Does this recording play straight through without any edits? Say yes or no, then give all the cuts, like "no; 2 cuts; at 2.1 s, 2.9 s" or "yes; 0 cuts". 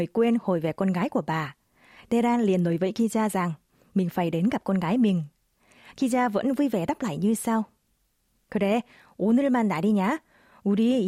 yes; 0 cuts